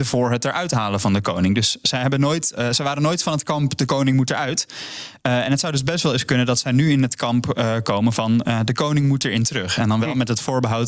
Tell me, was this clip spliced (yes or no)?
no